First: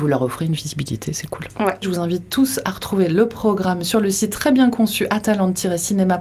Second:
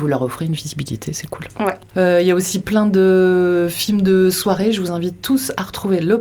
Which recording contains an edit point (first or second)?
first